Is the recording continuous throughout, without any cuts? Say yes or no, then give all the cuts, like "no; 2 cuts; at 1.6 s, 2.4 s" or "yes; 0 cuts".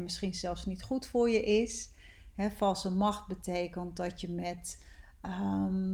yes; 0 cuts